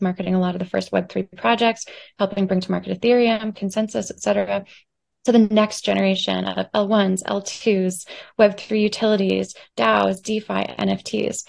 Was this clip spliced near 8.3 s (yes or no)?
no